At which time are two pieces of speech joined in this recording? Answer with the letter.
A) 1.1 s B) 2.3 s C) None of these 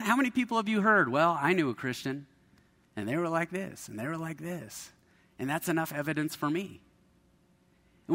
C